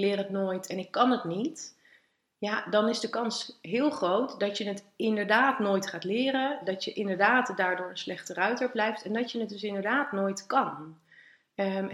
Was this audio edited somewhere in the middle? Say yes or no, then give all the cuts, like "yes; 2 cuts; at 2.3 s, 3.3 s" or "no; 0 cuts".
no; 0 cuts